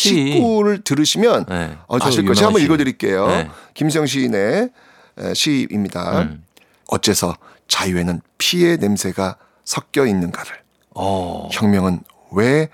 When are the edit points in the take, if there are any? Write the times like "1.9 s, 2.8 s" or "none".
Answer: 2.0 s, 6.8 s